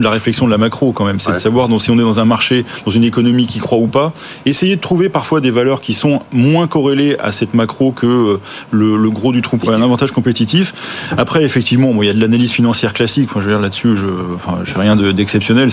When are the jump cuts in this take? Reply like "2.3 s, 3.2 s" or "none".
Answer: 9.6 s